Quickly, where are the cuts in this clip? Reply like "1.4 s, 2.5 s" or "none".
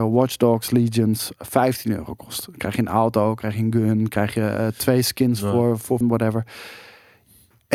6.0 s